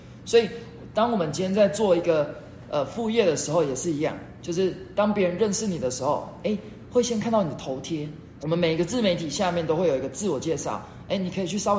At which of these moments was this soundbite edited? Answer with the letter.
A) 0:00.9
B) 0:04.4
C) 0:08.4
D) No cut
C